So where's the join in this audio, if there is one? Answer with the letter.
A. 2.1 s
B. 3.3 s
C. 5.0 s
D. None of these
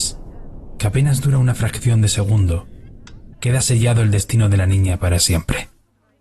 B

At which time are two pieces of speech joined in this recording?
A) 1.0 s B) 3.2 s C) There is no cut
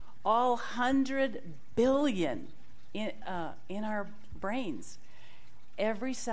C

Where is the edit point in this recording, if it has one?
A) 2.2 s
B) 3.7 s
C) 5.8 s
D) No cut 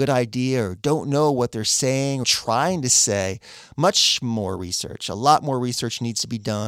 A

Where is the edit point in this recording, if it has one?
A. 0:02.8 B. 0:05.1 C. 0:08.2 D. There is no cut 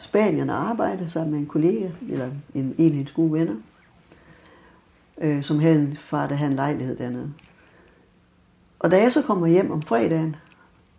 D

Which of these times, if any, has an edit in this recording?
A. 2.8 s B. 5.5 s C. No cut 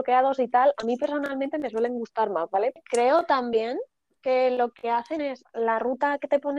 A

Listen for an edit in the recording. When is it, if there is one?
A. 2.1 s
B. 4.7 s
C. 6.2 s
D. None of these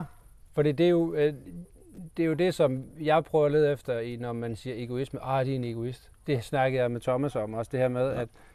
C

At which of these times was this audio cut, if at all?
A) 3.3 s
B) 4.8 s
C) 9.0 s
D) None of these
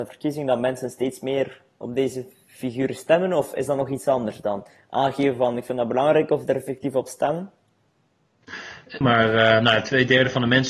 C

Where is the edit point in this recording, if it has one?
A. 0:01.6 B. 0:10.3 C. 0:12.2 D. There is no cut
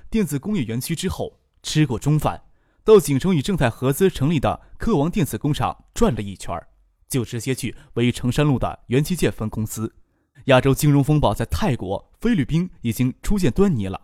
B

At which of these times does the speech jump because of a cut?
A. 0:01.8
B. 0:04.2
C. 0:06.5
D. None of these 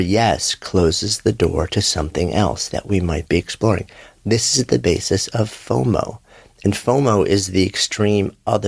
D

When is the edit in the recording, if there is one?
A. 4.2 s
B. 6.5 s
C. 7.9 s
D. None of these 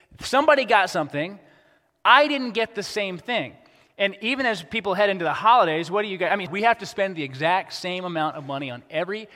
B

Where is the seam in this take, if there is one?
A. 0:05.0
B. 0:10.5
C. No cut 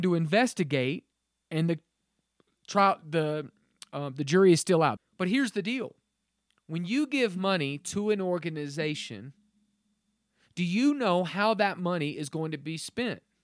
A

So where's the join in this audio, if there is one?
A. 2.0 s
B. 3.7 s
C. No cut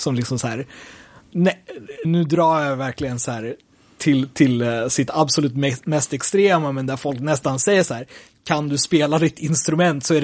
A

